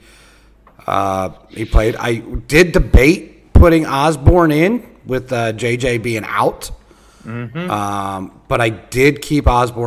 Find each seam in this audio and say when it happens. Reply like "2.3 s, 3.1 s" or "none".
none